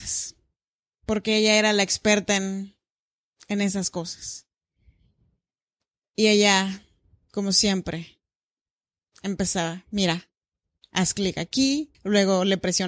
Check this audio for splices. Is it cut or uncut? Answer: cut